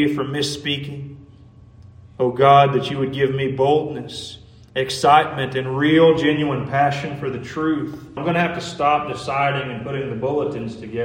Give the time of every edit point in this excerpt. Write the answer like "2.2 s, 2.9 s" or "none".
8.2 s

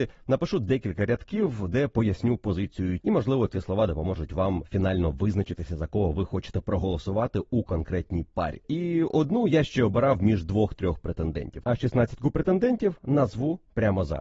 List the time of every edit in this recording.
3.0 s, 8.6 s, 11.6 s

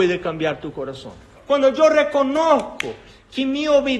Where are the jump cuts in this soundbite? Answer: 1.4 s

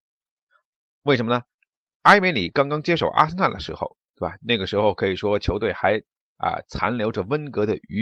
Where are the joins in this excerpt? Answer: none

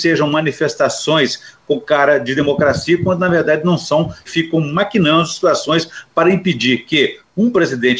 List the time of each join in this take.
4.3 s

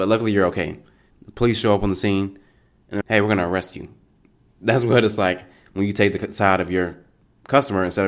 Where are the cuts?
1.1 s, 3.0 s

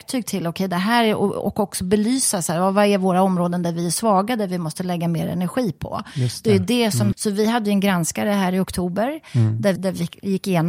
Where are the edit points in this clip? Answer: 7.1 s, 9.8 s

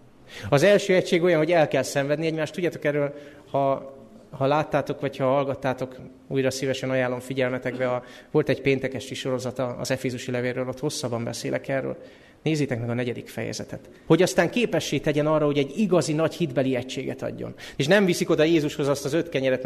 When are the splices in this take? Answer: 14.1 s, 17.8 s

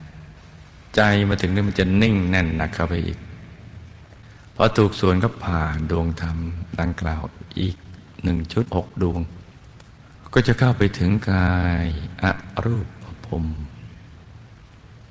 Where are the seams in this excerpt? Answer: none

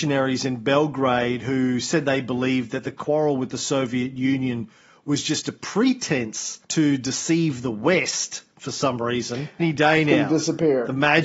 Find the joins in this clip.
6.6 s, 9.6 s

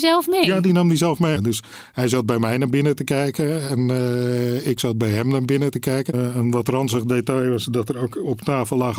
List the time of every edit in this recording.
1.3 s, 6.1 s

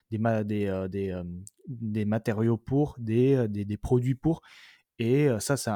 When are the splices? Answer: none

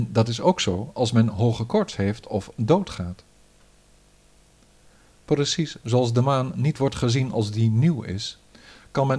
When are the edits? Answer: none

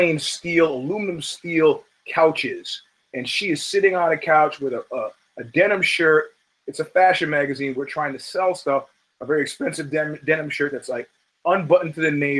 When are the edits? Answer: none

